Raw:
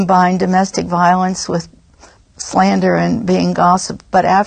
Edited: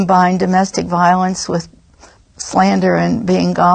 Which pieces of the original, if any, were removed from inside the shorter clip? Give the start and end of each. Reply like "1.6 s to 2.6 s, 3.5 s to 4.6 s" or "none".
none